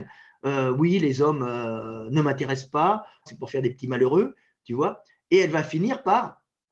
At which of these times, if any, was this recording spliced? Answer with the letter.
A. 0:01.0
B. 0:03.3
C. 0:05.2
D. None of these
B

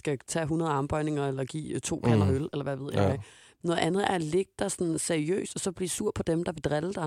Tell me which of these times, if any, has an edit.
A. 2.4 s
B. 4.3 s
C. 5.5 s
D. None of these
D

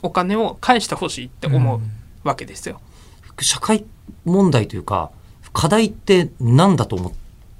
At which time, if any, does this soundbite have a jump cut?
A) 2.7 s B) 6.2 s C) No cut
A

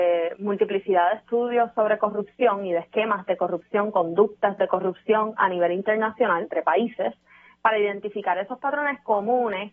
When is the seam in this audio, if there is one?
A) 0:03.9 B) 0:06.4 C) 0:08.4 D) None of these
B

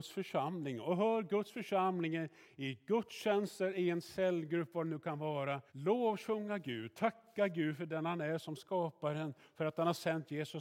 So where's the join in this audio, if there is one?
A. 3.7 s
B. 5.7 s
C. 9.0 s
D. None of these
B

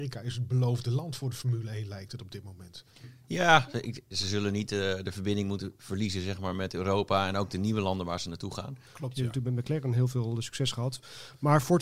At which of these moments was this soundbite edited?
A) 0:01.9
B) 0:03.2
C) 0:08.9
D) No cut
C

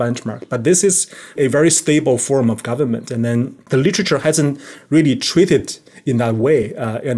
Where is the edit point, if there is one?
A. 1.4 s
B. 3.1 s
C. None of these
A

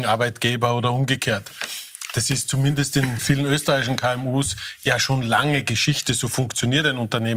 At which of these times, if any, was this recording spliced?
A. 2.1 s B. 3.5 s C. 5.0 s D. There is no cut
D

